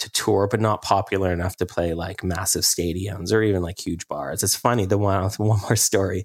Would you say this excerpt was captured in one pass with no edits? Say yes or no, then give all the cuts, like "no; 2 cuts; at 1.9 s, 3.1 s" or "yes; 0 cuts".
no; 1 cut; at 4.4 s